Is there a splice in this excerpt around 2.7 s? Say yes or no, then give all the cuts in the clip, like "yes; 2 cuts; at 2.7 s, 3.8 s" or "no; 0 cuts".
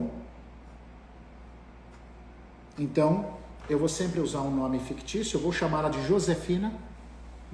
no; 0 cuts